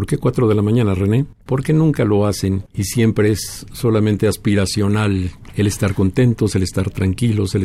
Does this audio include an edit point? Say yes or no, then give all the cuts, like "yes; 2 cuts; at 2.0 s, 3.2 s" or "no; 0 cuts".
yes; 2 cuts; at 1.5 s, 2.7 s